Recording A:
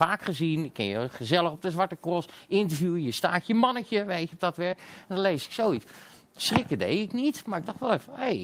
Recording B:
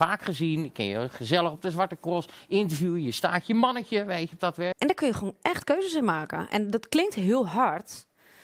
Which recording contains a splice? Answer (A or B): B